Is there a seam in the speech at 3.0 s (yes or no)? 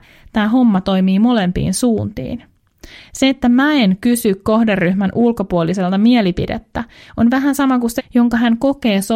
no